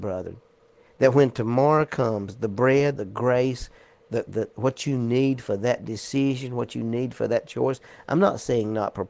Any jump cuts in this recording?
yes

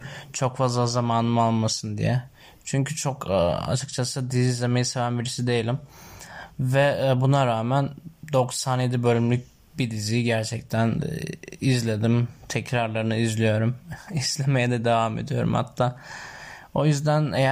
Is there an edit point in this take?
no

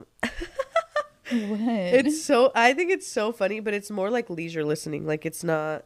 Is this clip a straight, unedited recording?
yes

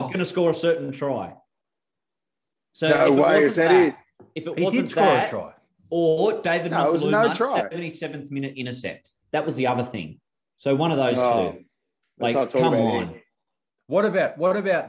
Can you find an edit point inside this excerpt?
no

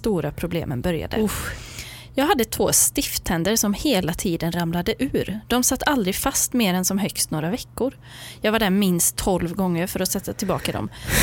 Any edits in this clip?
no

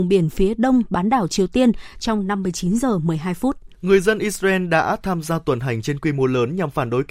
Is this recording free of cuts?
no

